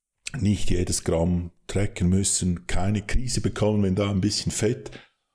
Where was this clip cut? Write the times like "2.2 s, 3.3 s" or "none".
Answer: none

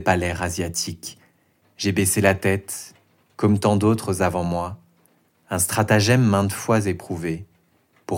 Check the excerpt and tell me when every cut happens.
1.6 s, 3.3 s

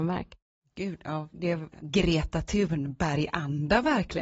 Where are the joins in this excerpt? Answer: 1.7 s

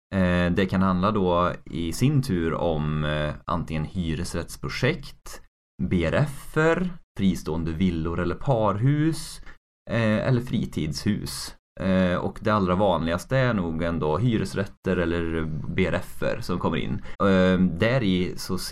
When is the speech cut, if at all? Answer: 17.1 s

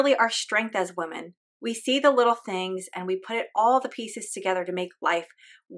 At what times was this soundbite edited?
none

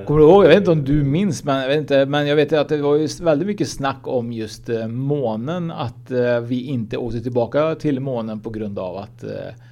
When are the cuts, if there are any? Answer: none

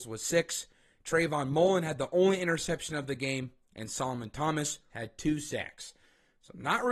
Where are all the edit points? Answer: 4.9 s

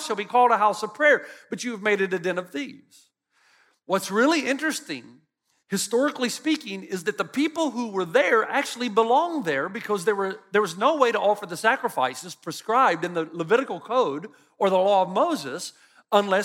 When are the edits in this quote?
none

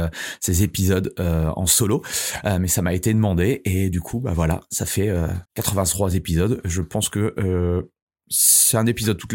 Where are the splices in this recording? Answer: 5.5 s

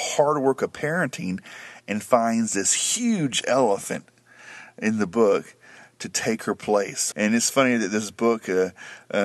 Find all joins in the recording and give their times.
7.1 s

